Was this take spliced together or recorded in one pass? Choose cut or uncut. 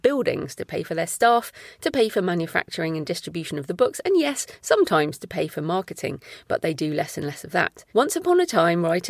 cut